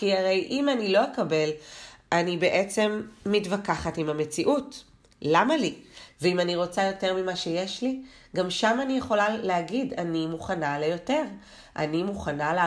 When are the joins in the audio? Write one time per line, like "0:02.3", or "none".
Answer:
0:06.1